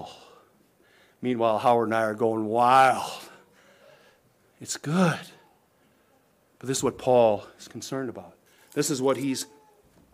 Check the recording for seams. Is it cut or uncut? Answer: uncut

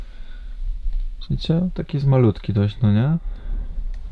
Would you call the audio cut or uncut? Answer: cut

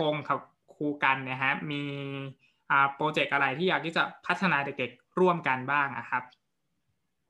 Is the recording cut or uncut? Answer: uncut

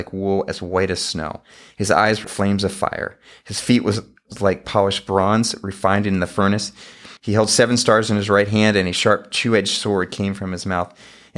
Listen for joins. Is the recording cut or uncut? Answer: cut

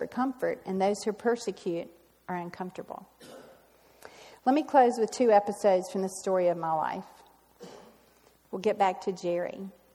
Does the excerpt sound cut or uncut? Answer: uncut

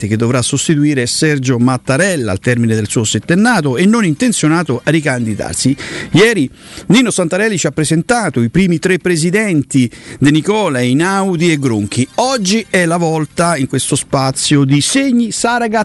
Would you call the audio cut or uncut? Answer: uncut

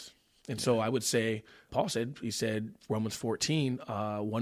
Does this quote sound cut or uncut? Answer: cut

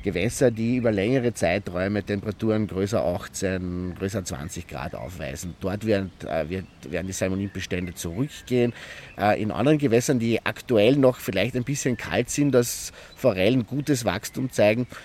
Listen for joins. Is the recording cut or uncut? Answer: uncut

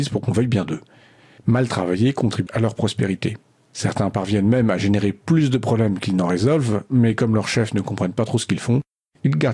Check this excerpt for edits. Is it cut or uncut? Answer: cut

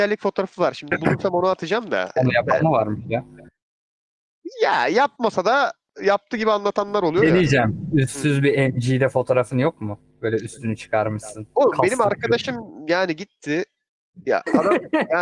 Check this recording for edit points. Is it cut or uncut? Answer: cut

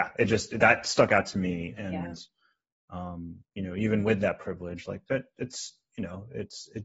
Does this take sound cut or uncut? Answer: cut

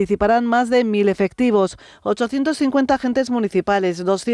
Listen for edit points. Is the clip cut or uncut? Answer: uncut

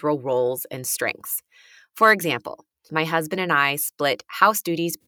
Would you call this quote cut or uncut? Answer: cut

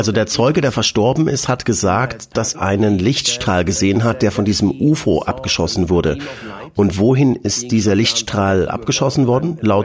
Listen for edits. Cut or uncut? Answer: cut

